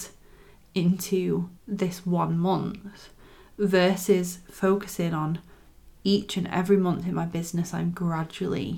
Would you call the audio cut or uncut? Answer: cut